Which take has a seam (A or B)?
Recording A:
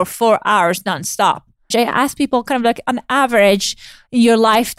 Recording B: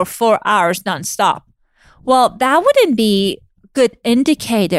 A